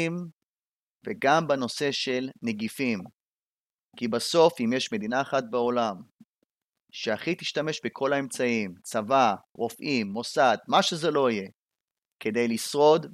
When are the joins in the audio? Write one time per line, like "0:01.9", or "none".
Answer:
0:09.6